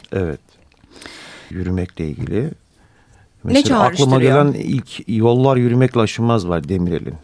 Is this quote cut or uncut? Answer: cut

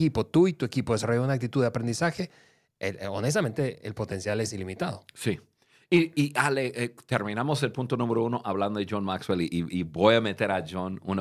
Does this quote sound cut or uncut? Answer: uncut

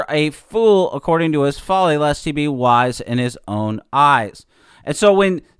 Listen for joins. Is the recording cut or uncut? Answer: uncut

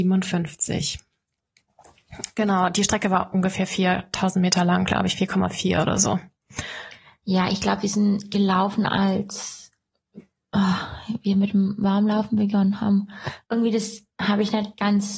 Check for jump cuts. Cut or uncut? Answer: uncut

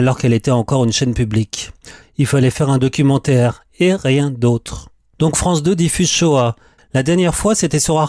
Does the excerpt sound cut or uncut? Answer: cut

